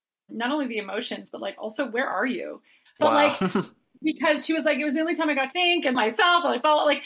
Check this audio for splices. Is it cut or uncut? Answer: cut